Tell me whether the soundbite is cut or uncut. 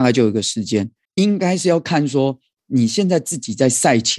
cut